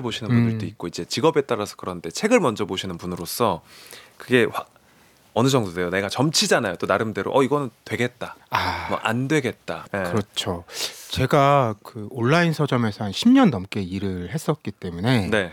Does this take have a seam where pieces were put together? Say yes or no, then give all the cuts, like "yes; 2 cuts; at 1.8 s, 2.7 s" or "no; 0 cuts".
yes; 1 cut; at 9.9 s